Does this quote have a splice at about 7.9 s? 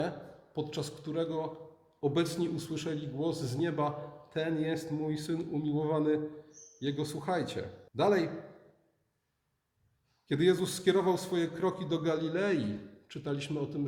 yes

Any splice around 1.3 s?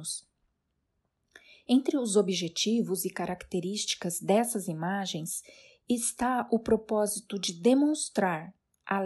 no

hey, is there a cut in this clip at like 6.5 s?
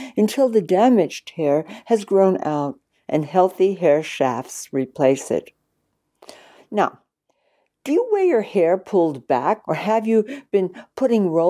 yes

